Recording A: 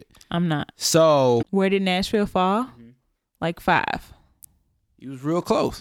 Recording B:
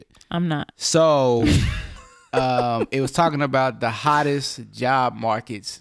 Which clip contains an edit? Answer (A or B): A